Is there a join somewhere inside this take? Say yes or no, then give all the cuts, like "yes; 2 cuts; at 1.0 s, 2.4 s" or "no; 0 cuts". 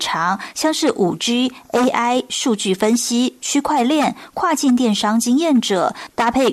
no; 0 cuts